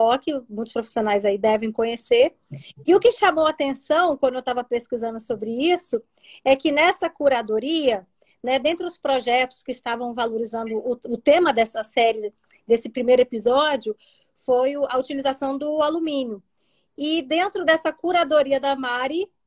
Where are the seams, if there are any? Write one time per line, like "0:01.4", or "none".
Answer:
none